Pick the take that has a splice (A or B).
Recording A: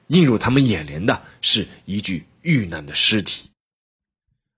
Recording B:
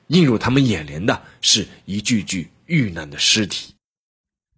A